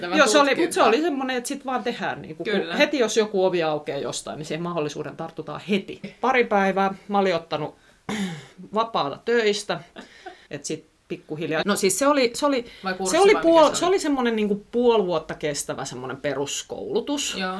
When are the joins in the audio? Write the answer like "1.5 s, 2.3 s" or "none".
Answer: 6.0 s, 10.5 s, 11.6 s